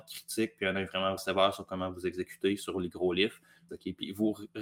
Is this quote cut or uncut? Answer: cut